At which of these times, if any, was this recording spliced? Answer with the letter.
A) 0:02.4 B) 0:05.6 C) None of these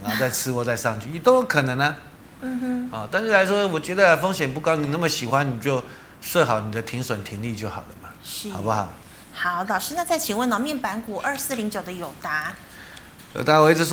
A